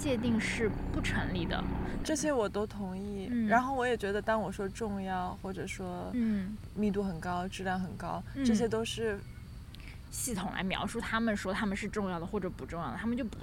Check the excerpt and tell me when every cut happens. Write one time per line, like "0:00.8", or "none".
0:02.0
0:10.1